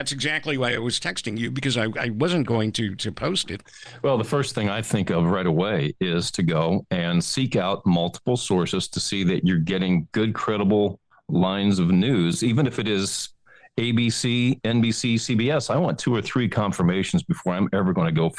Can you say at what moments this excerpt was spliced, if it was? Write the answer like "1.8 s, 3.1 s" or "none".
none